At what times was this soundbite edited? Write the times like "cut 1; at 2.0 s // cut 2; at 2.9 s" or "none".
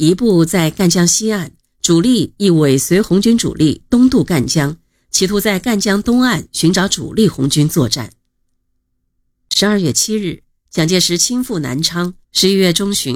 cut 1; at 12.2 s